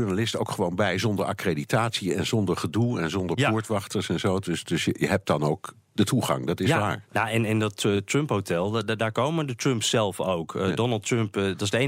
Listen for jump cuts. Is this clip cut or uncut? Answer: uncut